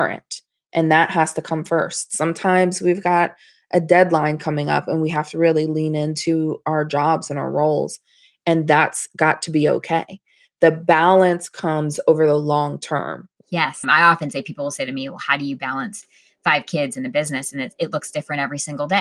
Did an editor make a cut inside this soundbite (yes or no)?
yes